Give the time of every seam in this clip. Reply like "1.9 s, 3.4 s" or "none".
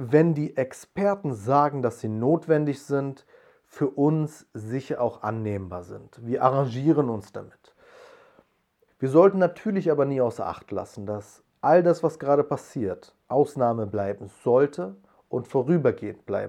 8.9 s, 13.2 s